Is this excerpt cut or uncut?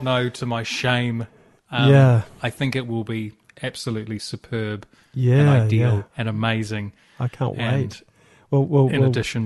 cut